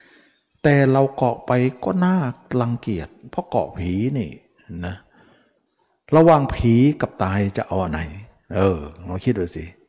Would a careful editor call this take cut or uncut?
uncut